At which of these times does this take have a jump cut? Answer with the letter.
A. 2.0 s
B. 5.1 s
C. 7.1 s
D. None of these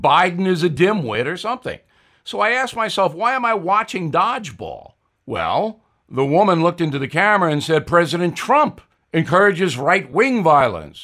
B